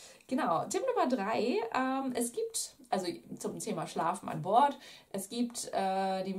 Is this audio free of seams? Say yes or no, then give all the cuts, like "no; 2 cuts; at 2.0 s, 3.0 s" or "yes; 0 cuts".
yes; 0 cuts